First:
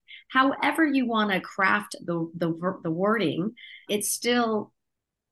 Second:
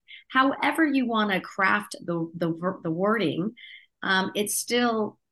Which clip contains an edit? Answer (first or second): first